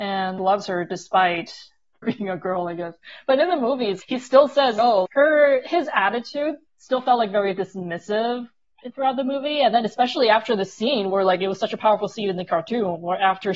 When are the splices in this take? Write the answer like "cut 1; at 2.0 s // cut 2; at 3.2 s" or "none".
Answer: cut 1; at 5.1 s // cut 2; at 6.7 s